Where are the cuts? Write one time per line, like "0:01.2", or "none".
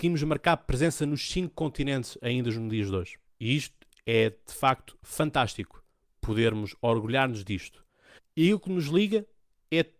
0:03.3
0:08.2